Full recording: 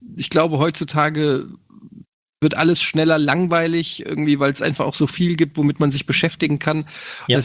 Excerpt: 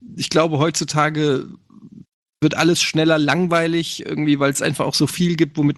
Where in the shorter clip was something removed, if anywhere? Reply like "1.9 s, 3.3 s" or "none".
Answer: none